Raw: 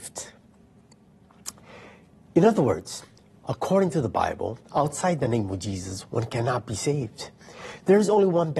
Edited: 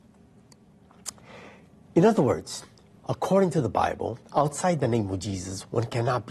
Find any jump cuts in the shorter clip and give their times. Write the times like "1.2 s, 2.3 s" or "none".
none